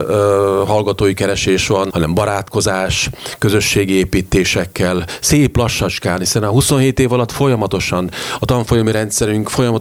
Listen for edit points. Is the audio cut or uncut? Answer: cut